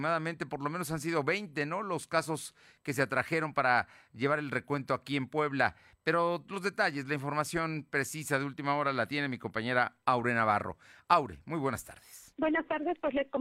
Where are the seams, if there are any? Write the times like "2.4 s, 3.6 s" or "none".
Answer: 12.3 s